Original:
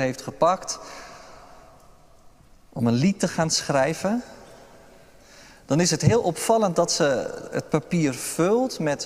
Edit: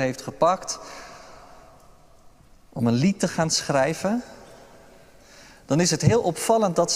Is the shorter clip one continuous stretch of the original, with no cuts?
yes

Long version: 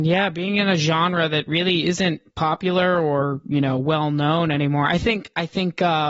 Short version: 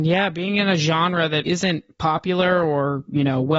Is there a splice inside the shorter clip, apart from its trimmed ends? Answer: yes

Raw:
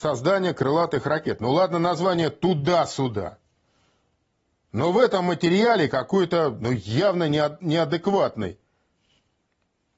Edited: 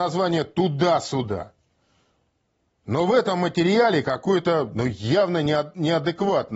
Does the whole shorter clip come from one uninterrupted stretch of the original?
yes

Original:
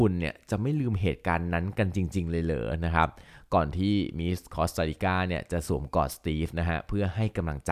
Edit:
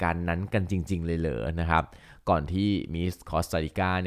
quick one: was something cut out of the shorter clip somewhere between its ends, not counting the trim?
no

